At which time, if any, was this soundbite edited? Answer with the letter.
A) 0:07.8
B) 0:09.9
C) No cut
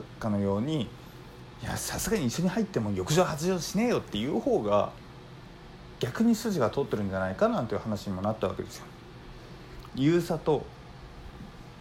B